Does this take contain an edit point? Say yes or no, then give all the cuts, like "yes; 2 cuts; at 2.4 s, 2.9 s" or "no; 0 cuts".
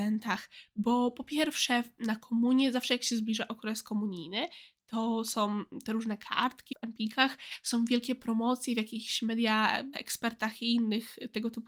yes; 2 cuts; at 6.7 s, 9.9 s